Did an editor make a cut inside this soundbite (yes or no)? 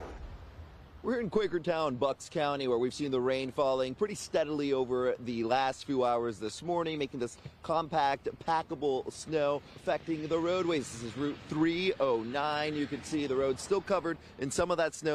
yes